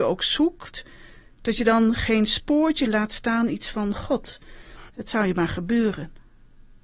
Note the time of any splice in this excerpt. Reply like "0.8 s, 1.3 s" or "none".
2.9 s, 4.9 s